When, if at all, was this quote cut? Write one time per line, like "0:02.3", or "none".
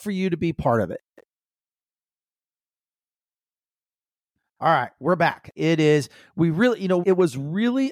0:05.6
0:07.0